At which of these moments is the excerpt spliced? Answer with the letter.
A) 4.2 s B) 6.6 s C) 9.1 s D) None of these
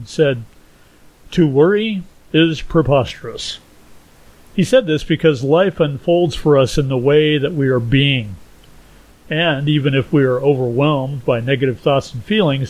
C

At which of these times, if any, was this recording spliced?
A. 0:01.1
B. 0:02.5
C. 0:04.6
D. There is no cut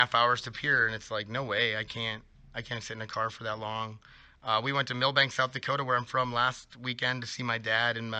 D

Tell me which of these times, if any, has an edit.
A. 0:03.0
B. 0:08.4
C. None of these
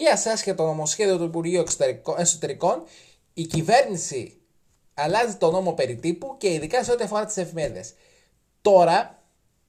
C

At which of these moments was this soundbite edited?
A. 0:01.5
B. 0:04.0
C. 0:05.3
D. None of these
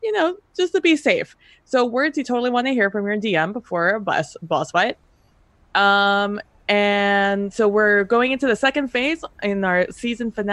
D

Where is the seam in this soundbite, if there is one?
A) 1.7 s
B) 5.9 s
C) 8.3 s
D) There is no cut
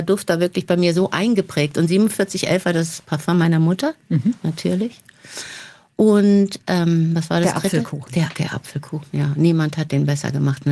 C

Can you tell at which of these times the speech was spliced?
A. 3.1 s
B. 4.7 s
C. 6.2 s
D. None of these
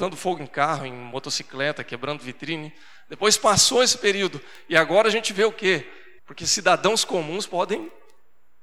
C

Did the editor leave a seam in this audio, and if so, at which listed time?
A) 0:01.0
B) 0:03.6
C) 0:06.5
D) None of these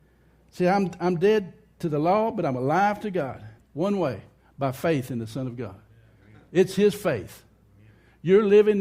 B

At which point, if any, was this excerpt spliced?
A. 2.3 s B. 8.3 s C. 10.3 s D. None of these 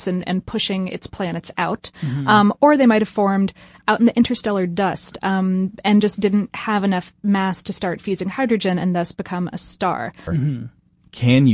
C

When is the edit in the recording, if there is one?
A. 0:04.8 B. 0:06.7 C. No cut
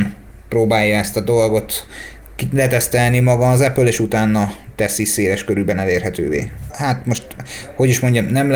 B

